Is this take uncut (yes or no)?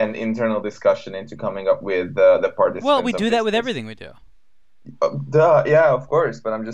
yes